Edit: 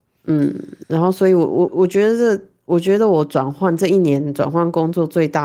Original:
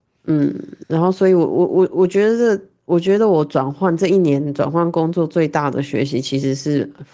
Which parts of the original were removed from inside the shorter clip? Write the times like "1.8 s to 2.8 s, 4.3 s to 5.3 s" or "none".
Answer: 1.7 s to 1.9 s